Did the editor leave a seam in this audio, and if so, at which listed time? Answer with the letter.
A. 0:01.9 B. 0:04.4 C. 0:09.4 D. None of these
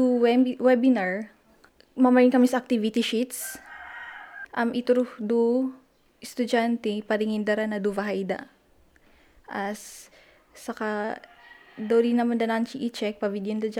B